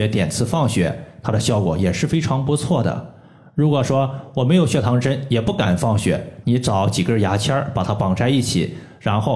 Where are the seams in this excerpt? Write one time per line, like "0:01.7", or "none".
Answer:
0:06.4